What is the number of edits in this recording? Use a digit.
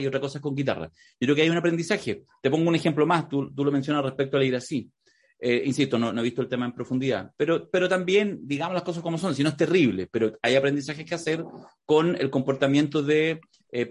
0